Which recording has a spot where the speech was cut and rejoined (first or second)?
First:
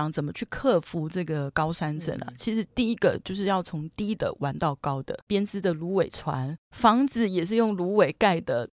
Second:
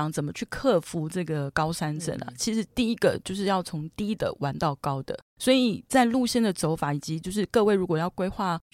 first